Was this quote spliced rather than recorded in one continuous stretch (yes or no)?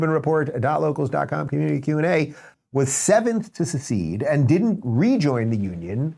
yes